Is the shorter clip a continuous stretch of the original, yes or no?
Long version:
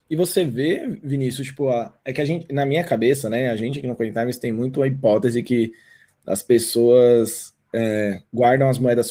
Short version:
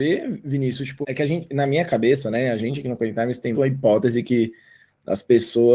no